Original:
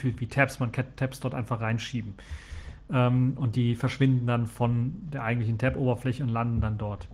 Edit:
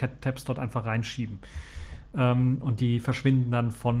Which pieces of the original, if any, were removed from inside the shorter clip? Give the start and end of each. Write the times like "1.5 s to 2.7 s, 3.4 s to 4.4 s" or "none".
none